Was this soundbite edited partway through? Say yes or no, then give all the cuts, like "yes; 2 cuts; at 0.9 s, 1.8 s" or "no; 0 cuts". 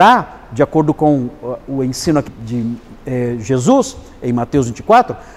yes; 1 cut; at 2.3 s